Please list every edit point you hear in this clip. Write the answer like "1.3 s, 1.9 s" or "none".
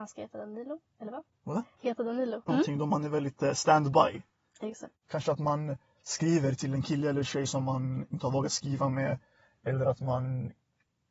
2.5 s, 5.0 s

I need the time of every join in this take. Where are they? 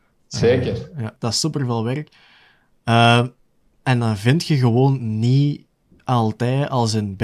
1.2 s

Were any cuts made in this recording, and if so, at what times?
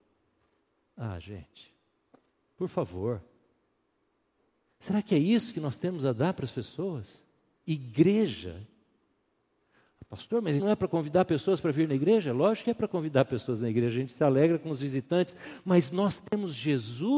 10.6 s

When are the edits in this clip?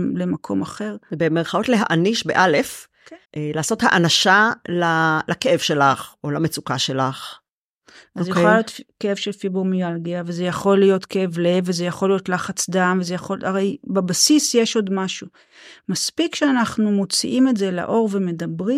3.2 s

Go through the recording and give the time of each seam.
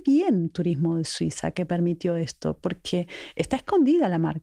none

